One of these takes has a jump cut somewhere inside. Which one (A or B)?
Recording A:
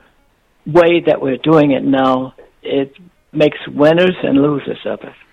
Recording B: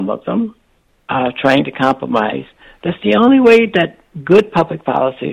A